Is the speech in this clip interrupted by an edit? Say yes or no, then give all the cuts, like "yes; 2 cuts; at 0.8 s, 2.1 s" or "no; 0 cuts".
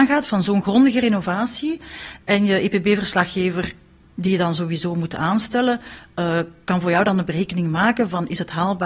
no; 0 cuts